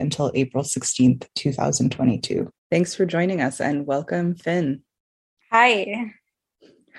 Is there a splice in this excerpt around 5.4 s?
no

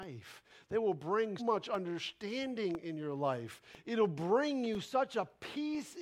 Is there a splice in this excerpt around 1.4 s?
yes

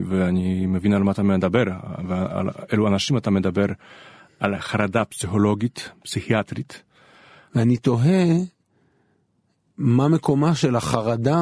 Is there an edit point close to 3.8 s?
no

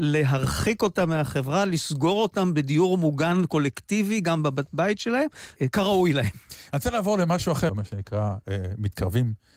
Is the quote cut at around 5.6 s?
yes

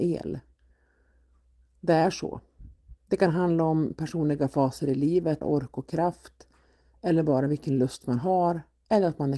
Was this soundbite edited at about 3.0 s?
yes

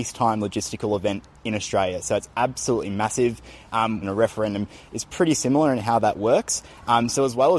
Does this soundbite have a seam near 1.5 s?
no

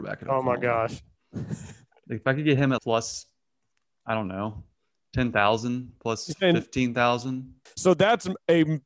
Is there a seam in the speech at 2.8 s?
yes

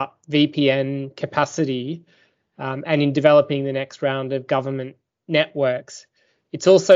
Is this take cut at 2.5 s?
no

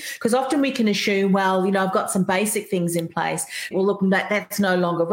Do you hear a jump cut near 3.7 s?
yes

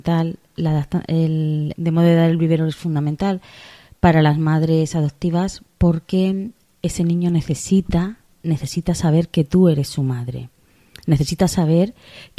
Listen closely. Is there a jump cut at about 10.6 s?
no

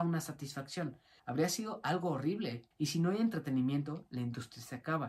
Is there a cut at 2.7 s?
yes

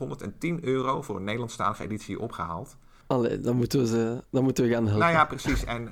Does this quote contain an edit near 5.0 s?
no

